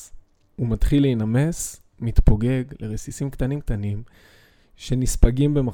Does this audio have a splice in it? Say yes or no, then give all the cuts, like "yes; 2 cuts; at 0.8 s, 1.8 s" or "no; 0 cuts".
yes; 1 cut; at 3.6 s